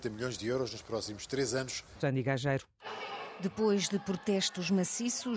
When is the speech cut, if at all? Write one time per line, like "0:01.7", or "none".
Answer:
0:02.0